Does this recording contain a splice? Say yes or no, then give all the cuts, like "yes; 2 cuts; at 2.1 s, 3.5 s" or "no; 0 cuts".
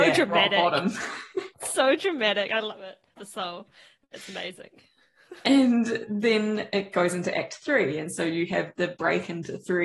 yes; 1 cut; at 3.2 s